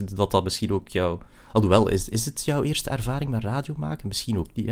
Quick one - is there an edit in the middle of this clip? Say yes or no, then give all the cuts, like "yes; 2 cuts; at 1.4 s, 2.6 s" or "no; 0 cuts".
no; 0 cuts